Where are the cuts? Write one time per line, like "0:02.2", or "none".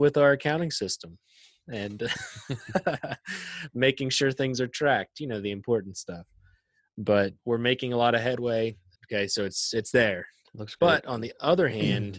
0:07.4
0:09.0